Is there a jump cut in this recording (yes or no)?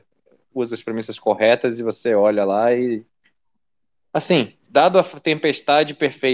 no